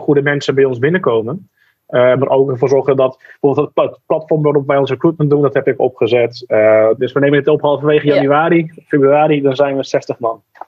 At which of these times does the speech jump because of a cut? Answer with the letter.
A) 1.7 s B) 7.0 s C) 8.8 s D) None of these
B